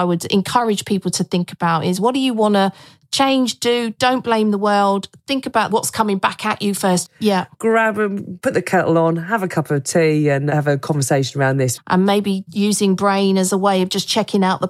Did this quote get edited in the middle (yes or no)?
yes